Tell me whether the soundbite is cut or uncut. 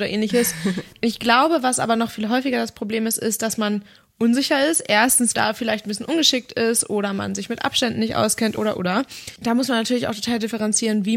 cut